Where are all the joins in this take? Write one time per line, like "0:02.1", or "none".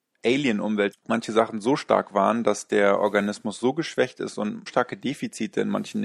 0:00.9
0:04.7

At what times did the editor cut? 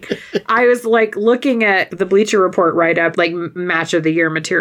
0:03.1

